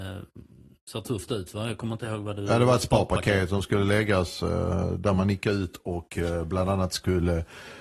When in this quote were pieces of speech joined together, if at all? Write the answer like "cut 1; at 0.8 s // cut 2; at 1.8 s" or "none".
none